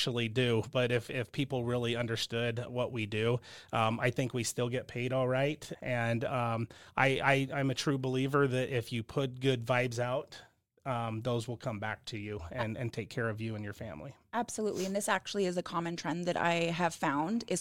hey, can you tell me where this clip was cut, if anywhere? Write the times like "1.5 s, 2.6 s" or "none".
5.7 s